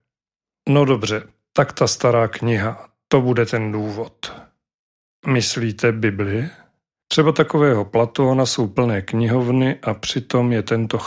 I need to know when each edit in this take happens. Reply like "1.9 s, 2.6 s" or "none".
6.9 s

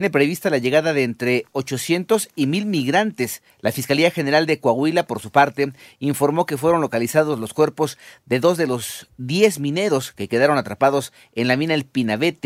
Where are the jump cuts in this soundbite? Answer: 3.5 s

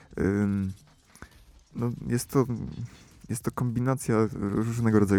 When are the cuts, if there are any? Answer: none

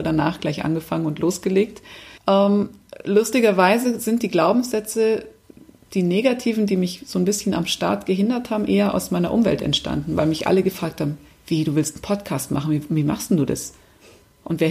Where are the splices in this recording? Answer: 2.2 s

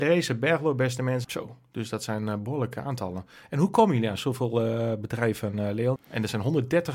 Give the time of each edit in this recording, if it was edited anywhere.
1.2 s, 6.0 s

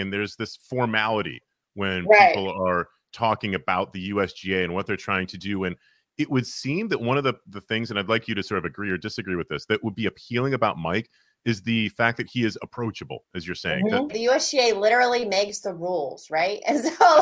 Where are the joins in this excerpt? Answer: 14.1 s

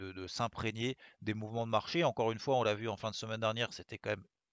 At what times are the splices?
none

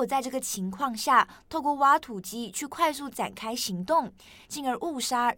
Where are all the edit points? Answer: 4.4 s

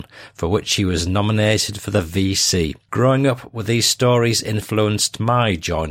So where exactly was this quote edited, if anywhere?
2.9 s

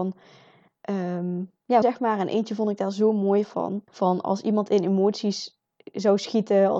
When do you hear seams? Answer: 1.8 s, 3.9 s

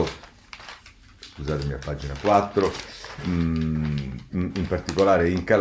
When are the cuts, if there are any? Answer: 3.2 s, 4.3 s

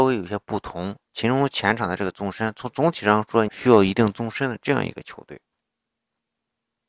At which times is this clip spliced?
1.1 s, 3.5 s

